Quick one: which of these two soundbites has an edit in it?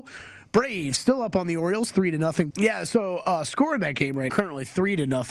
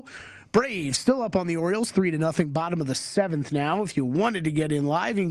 first; 2 cuts; at 2.5 s, 4.3 s

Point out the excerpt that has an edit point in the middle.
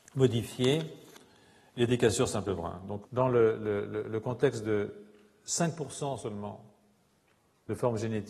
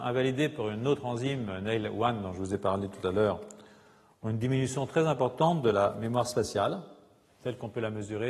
first; 1 cut; at 3.0 s

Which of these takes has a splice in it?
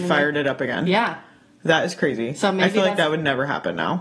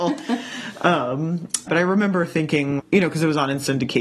second; 2 cuts; at 1.7 s, 2.8 s

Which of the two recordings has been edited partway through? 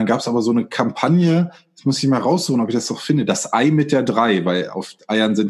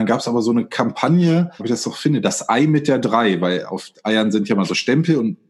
second; 1 cut; at 1.6 s

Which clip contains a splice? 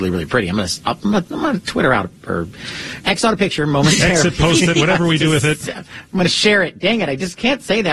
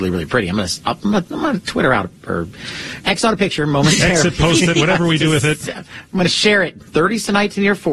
second; 1 cut; at 6.8 s

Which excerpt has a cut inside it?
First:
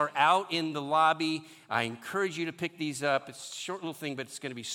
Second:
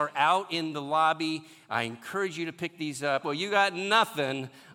second; 1 cut; at 3.2 s

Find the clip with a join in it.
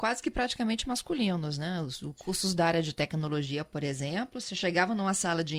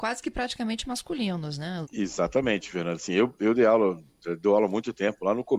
second; 1 cut; at 1.8 s

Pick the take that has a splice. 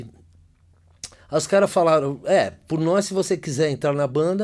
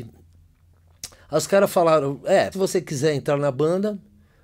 second; 1 cut; at 2.5 s

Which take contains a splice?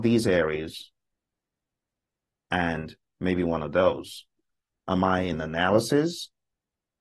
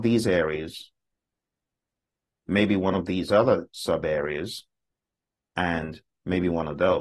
first; 2 cuts; at 2.4 s, 4.7 s

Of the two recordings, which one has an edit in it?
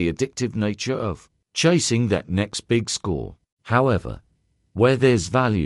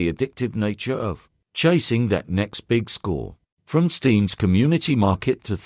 second; 1 cut; at 3.6 s

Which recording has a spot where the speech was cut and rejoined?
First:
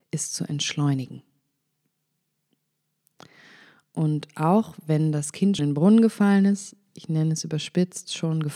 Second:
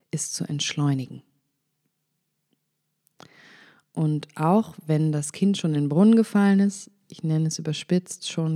first; 1 cut; at 5.6 s

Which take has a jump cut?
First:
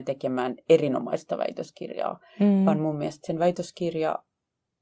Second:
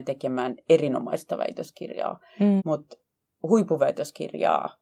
second; 1 cut; at 2.6 s

